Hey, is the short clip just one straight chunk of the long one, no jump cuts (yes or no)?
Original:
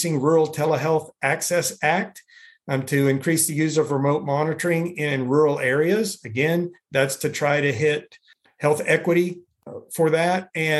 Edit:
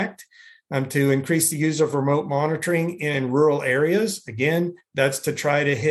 yes